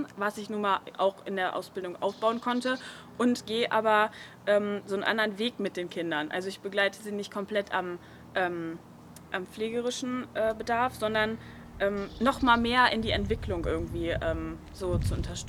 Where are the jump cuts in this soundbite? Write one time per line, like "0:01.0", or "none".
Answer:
none